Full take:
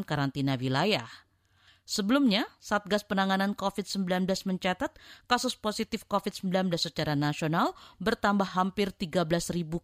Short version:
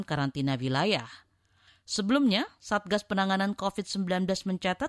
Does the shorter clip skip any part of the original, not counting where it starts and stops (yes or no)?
no